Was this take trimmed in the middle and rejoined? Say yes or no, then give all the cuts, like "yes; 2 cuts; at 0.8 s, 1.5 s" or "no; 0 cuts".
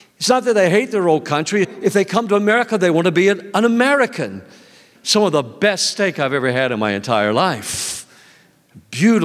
yes; 2 cuts; at 1.6 s, 5.0 s